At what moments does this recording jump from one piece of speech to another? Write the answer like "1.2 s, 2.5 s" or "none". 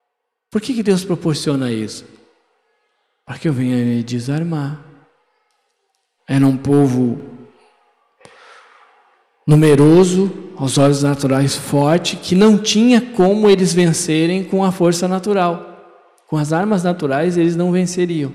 6.2 s